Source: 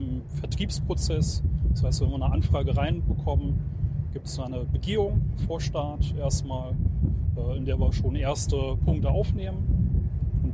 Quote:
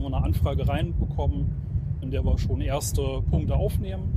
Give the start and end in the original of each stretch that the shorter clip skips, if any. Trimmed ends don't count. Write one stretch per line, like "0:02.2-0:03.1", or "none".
0:04.1-0:07.6